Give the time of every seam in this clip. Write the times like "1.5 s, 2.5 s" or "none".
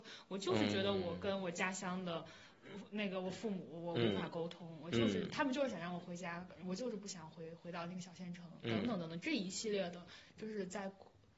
8.6 s